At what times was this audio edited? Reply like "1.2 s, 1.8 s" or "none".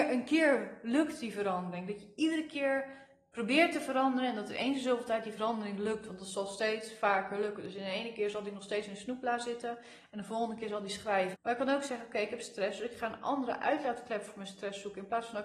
11.3 s